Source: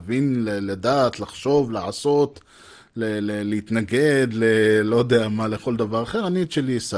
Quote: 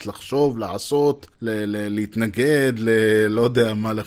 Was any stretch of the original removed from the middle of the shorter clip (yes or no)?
yes